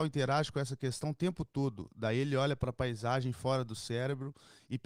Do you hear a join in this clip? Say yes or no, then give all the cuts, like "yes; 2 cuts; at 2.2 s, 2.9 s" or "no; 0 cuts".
no; 0 cuts